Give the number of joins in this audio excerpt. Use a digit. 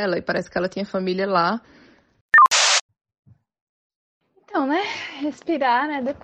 0